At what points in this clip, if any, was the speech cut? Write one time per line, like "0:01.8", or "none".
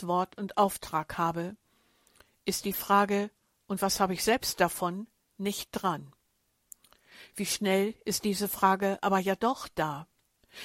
none